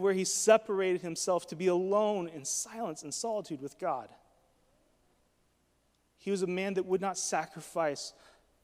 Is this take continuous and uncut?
yes; 0 cuts

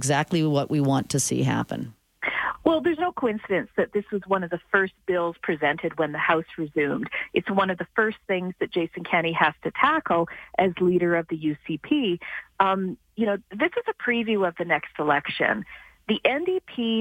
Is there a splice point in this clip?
no; 0 cuts

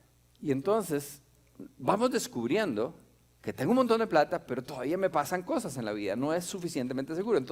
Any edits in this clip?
no; 0 cuts

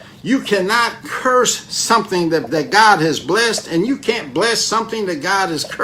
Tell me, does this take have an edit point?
yes; 1 cut; at 2.5 s

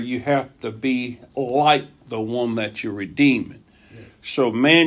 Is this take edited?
no; 0 cuts

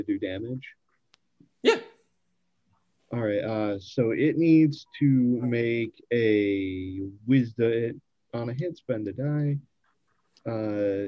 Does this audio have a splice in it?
no; 0 cuts

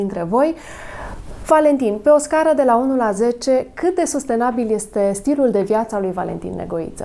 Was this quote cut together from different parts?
no; 0 cuts

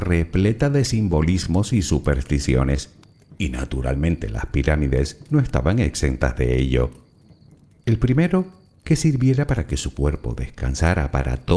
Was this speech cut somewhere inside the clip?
yes; 1 cut; at 7.8 s

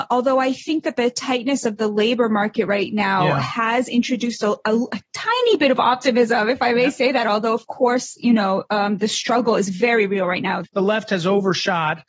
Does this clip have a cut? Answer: yes; 1 cut; at 10.6 s

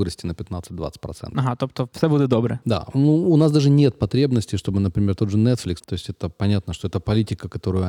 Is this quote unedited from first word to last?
no; 1 cut; at 5.8 s

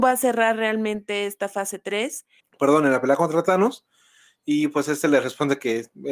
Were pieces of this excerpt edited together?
yes; 1 cut; at 2.4 s

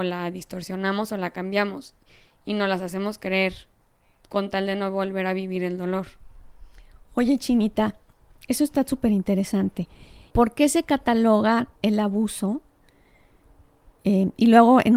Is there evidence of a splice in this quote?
yes; 2 cuts; at 10.3 s, 11.8 s

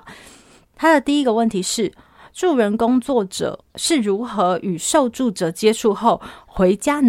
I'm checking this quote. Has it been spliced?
no; 0 cuts

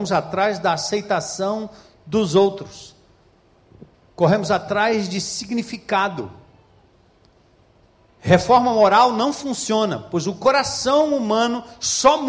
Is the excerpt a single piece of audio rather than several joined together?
yes; 0 cuts

